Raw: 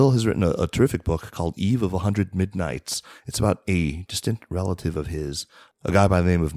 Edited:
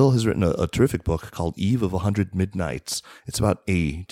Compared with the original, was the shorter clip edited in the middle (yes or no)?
no